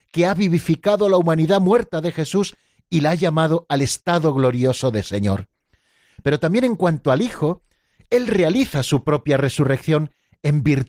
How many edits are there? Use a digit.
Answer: 0